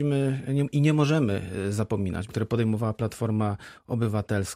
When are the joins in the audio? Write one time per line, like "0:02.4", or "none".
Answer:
0:02.3